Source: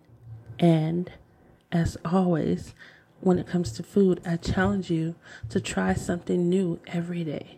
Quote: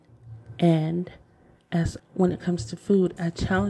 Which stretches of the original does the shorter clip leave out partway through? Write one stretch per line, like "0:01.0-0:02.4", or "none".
0:02.0-0:03.1